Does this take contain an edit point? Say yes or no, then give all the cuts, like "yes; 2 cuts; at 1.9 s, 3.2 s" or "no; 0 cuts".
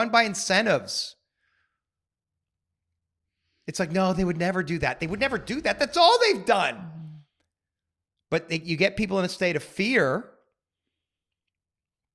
no; 0 cuts